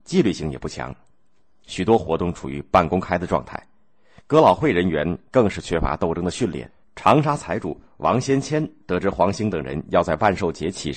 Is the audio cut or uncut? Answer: cut